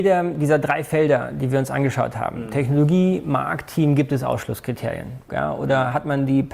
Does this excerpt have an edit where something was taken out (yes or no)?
yes